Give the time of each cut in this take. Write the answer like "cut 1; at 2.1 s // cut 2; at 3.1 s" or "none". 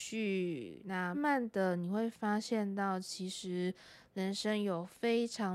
cut 1; at 1.1 s